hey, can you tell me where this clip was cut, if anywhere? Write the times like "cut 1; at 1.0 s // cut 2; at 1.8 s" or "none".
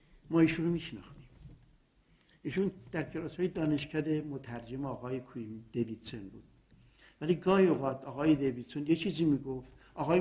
none

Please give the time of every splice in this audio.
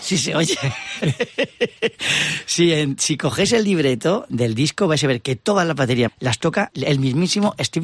cut 1; at 4.3 s // cut 2; at 6.1 s

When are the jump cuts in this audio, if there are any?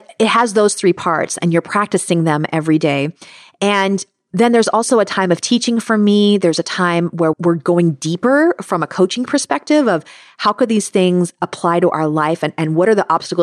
cut 1; at 7.3 s

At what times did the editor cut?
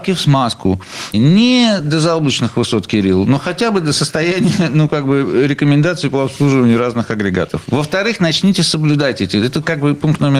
cut 1; at 1.1 s

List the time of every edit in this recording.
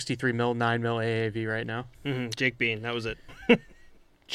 cut 1; at 1.9 s // cut 2; at 3.3 s

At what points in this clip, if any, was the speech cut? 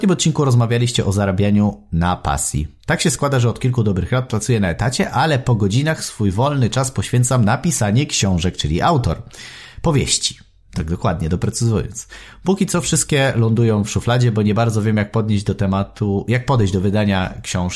none

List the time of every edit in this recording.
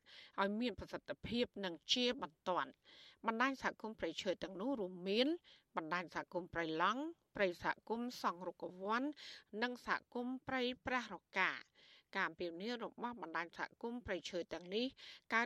none

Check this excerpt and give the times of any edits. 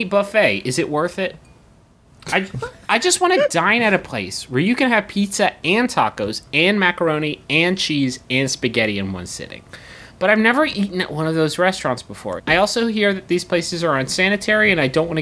cut 1; at 12.4 s

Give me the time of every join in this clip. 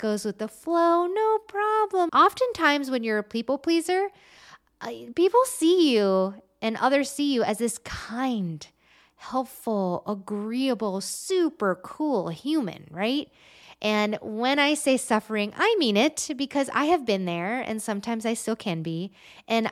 cut 1; at 2.1 s // cut 2; at 13.6 s

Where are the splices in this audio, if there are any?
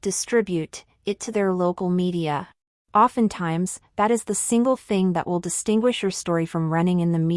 cut 1; at 2.8 s

